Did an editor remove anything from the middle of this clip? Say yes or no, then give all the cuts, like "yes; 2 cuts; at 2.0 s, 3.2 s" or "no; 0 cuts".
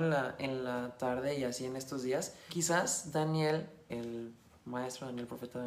yes; 2 cuts; at 2.5 s, 3.9 s